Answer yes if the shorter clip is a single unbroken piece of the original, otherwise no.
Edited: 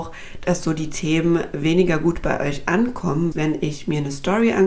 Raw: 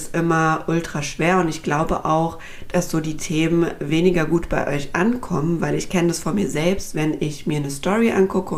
no